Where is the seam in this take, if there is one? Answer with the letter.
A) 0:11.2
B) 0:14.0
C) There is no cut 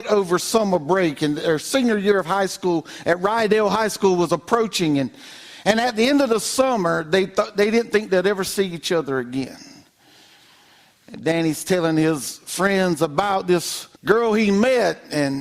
B